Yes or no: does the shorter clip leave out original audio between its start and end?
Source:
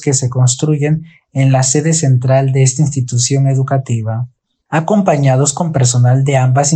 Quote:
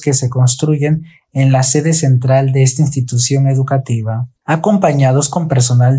yes